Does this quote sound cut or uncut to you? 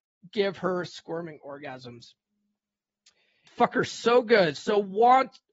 cut